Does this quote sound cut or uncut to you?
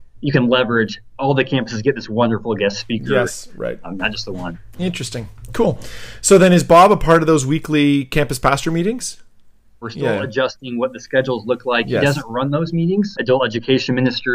cut